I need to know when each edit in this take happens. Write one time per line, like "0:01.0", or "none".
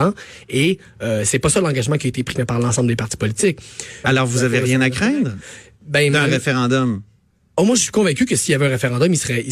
0:02.3
0:04.0